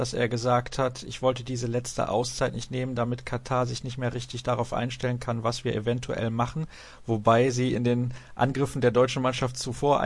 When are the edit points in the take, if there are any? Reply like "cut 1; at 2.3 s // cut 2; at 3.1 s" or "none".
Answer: none

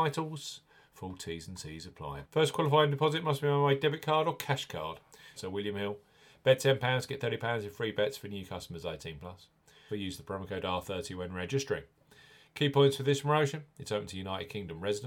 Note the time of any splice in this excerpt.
cut 1; at 2.2 s // cut 2; at 5.4 s // cut 3; at 9.9 s

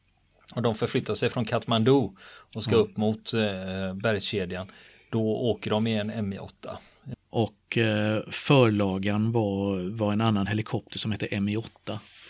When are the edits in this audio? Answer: cut 1; at 7.1 s

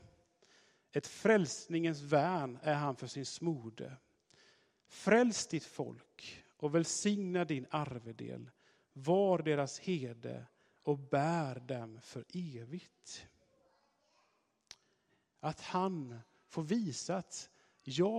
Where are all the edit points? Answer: cut 1; at 15.4 s

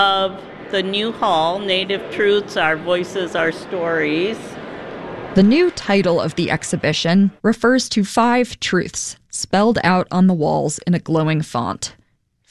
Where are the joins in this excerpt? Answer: cut 1; at 7.4 s

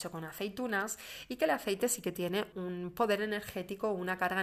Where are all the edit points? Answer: cut 1; at 2.5 s

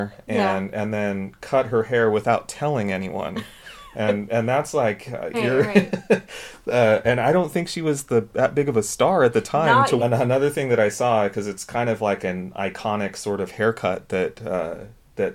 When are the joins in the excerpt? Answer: cut 1; at 5.3 s // cut 2; at 10.0 s

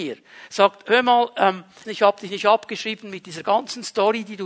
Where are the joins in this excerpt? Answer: cut 1; at 1.8 s

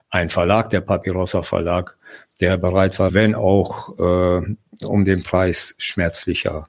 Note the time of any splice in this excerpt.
cut 1; at 3.1 s

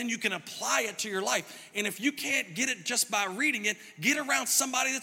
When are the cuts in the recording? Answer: none

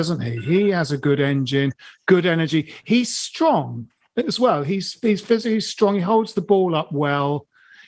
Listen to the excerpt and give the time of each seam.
none

